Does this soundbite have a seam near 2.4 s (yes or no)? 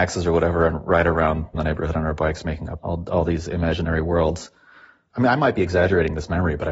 no